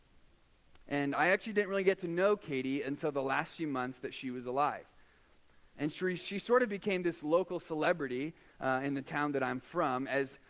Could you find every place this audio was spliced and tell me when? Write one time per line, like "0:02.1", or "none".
0:05.7